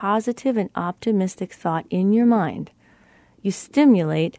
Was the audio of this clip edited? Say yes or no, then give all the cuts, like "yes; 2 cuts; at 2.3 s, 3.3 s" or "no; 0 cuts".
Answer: no; 0 cuts